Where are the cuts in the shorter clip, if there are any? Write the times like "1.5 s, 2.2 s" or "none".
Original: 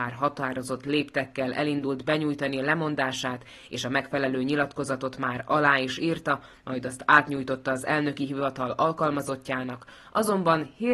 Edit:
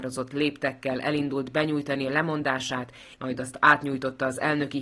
3.1 s